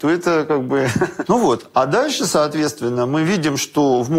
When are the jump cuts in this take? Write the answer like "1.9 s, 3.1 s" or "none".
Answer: 1.3 s